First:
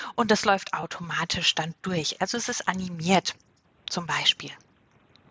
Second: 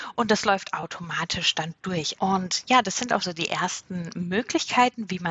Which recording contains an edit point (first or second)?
second